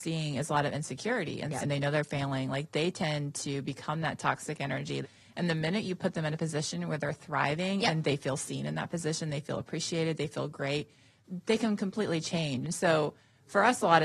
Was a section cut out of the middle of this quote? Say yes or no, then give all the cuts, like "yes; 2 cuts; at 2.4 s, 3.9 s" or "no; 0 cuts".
yes; 2 cuts; at 1.6 s, 5.0 s